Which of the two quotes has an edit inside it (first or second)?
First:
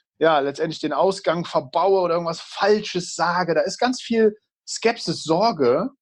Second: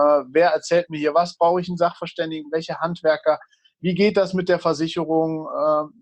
second